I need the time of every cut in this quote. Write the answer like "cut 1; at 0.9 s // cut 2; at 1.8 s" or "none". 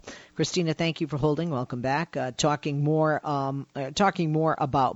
none

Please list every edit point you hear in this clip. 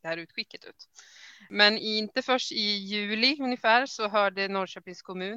none

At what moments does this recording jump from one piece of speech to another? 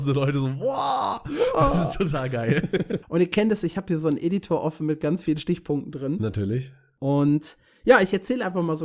cut 1; at 3.0 s

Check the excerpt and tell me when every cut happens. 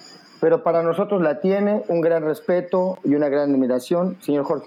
none

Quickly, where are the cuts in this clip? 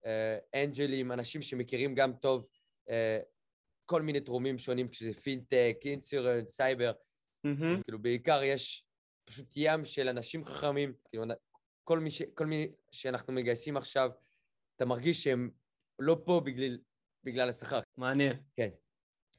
cut 1; at 7.8 s // cut 2; at 11.1 s // cut 3; at 17.8 s

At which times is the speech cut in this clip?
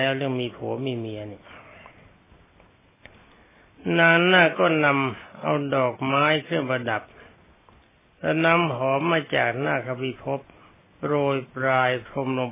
none

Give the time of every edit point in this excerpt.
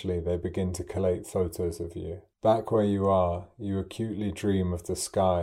cut 1; at 2.3 s

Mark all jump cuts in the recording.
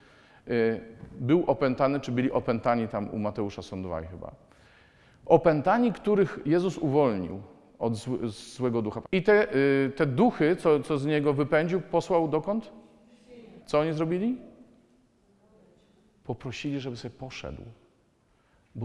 cut 1; at 9.0 s // cut 2; at 13.6 s

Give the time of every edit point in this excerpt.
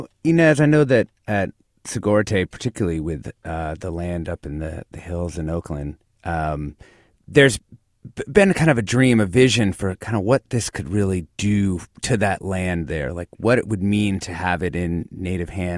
none

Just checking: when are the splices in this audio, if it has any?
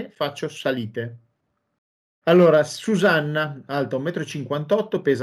cut 1; at 2.2 s // cut 2; at 3.7 s

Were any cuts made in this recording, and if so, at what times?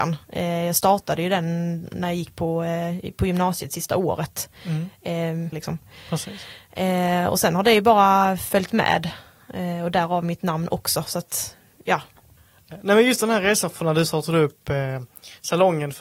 cut 1; at 5.5 s

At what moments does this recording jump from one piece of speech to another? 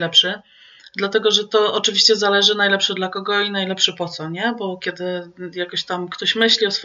none

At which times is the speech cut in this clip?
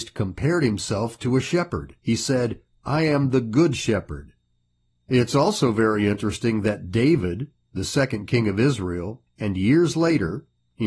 cut 1; at 2.0 s // cut 2; at 4.9 s // cut 3; at 9.3 s

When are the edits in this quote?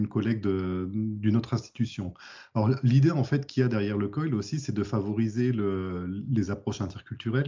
none

